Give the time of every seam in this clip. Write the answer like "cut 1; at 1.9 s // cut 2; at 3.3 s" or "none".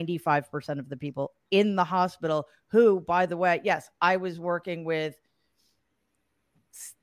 none